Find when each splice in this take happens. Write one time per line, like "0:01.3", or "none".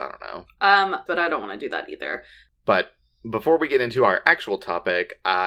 0:01.1